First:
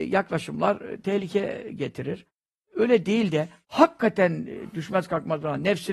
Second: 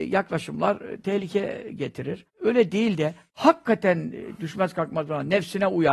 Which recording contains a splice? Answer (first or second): second